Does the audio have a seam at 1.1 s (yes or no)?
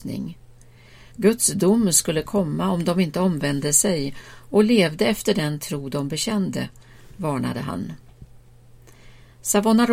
yes